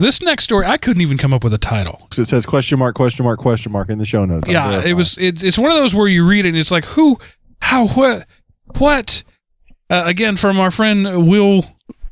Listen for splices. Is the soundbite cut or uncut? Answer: cut